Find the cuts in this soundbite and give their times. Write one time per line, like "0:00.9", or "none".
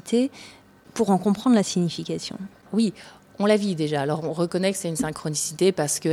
0:02.7